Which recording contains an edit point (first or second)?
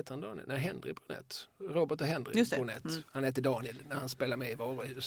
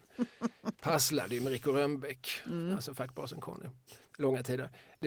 second